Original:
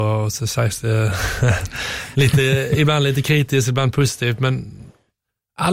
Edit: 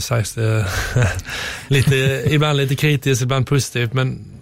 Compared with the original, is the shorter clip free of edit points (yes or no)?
yes